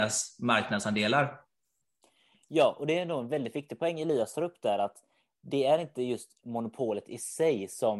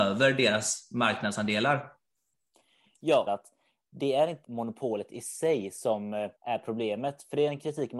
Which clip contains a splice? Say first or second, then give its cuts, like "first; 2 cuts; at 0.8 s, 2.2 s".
second; 3 cuts; at 3.3 s, 4.4 s, 6.4 s